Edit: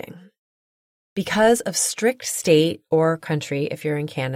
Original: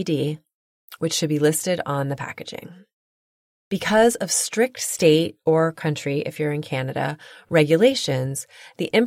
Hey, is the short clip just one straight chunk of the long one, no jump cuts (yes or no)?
yes